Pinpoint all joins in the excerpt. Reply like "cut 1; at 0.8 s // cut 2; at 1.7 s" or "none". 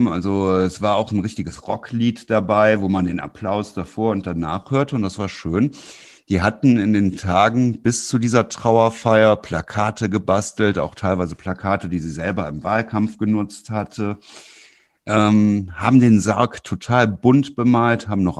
none